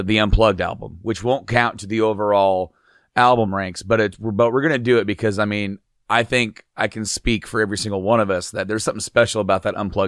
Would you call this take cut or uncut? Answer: uncut